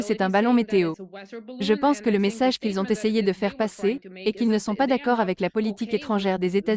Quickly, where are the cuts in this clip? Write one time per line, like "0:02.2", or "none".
none